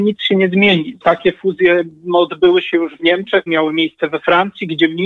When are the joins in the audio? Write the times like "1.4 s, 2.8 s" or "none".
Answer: 1.0 s, 3.5 s